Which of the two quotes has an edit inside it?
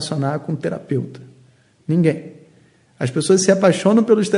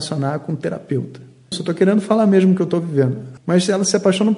second; 2 cuts; at 1.5 s, 3.4 s

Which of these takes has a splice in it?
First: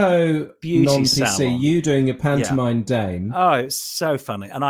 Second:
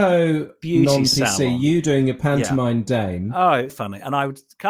second; 1 cut; at 3.7 s

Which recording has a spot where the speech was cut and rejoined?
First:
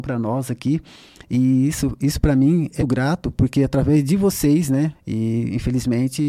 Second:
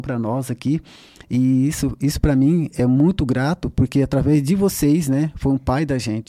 first; 2 cuts; at 2.8 s, 4.9 s

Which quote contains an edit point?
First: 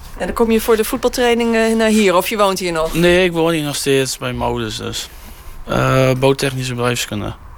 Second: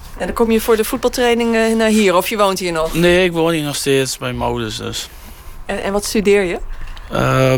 first; 1 cut; at 5.6 s

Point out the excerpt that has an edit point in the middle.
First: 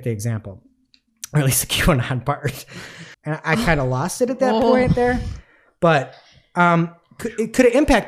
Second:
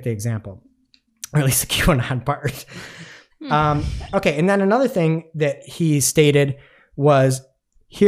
first; 1 cut; at 3.1 s

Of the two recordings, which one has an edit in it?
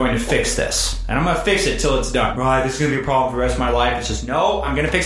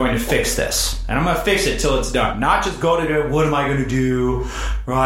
first; 1 cut; at 2.3 s

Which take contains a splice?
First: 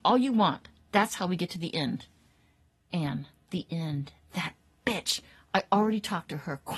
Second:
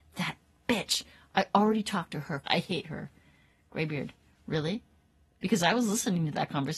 second; 1 cut; at 2.4 s

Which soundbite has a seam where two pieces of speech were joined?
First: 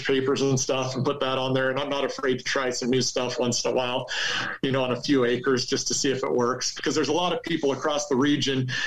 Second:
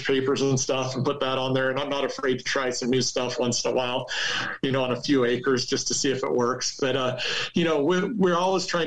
first; 1 cut; at 6.8 s

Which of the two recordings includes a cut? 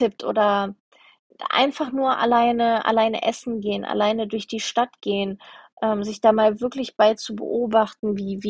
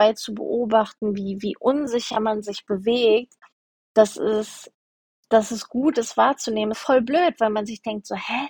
second; 1 cut; at 6.7 s

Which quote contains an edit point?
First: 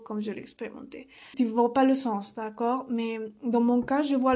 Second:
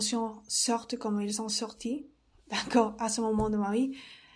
first; 1 cut; at 1.3 s

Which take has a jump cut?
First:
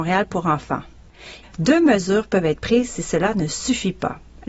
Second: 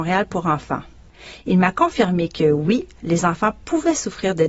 first; 1 cut; at 1.4 s

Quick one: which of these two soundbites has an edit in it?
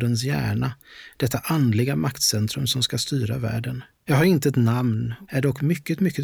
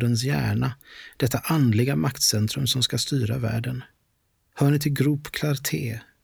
first; 2 cuts; at 4.1 s, 5.3 s

